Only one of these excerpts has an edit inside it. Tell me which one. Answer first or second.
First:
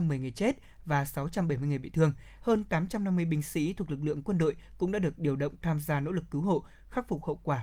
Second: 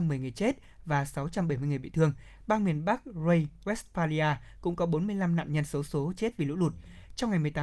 first